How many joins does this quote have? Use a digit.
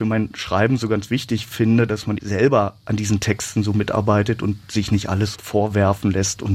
2